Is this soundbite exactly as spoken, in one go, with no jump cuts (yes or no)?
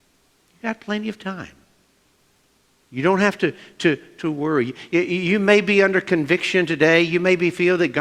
yes